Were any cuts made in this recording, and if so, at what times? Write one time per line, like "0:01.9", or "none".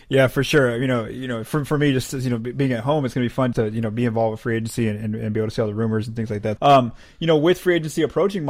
0:03.5
0:06.6